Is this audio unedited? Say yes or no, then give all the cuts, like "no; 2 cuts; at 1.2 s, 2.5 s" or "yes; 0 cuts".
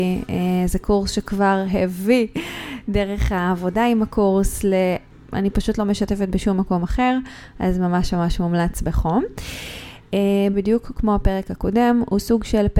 no; 2 cuts; at 5.1 s, 10.5 s